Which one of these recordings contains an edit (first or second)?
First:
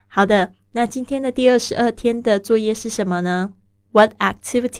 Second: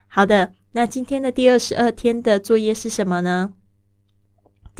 first